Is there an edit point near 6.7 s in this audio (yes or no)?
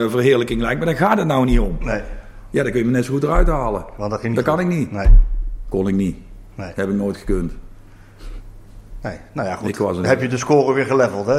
no